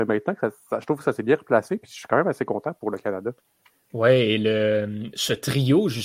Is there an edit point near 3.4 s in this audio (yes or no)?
no